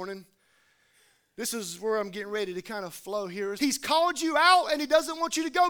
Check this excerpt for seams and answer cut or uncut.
cut